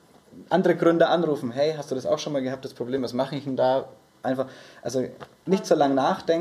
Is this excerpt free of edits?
yes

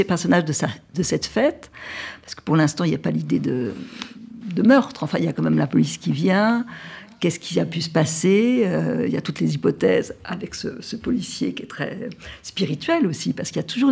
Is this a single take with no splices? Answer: yes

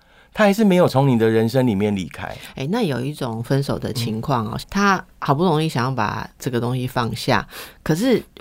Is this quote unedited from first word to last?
no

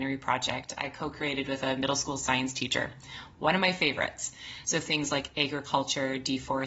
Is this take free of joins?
no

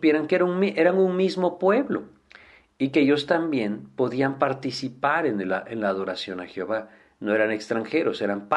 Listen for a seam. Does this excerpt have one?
no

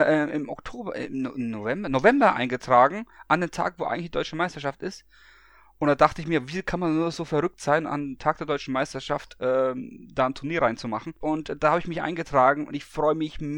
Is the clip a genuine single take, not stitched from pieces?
no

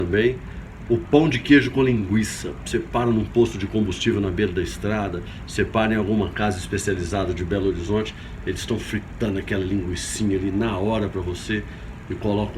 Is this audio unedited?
yes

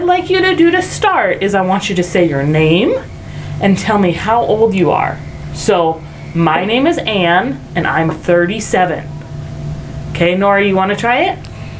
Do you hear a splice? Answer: no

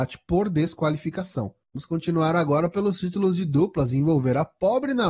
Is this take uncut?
no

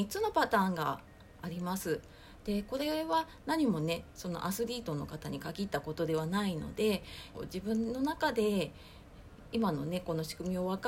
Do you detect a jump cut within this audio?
yes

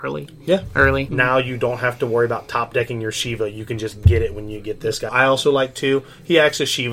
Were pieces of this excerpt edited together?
yes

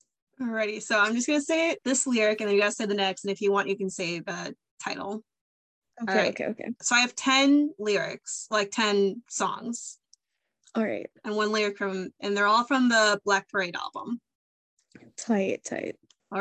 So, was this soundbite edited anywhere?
no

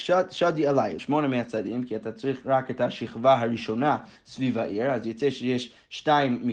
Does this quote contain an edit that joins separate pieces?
yes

